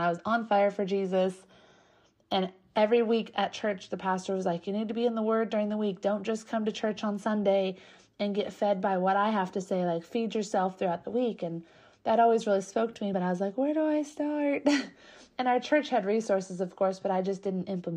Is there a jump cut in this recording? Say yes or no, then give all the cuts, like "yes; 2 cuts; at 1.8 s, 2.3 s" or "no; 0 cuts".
no; 0 cuts